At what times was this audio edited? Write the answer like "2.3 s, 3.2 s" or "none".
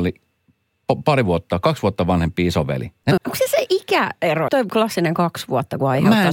3.2 s, 4.5 s